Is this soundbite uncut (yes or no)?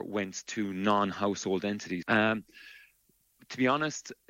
no